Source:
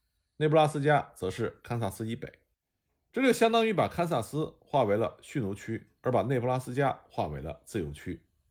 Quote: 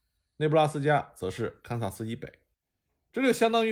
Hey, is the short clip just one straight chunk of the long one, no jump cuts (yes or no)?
yes